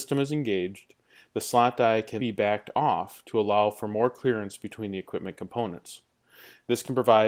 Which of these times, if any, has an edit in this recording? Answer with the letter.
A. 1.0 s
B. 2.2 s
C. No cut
B